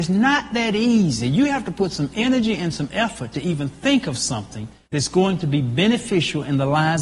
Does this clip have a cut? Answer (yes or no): no